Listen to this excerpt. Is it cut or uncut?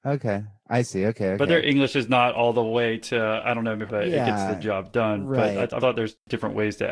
cut